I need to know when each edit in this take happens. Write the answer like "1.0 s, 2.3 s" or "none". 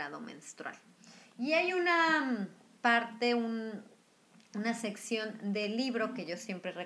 none